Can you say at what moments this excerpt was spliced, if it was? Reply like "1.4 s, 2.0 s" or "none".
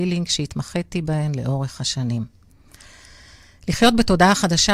none